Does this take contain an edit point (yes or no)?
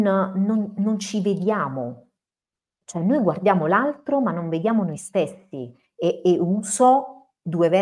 no